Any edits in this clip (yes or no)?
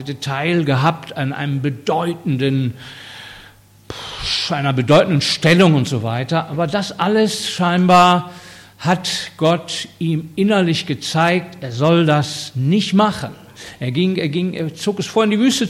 no